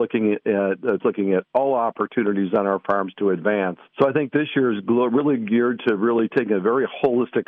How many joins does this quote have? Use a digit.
1